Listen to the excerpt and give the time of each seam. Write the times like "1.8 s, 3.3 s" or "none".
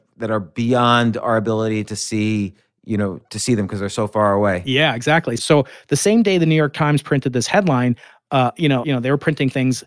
5.4 s, 8.8 s